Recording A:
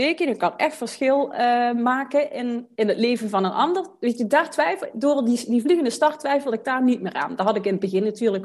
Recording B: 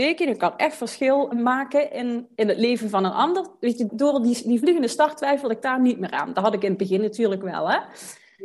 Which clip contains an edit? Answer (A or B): B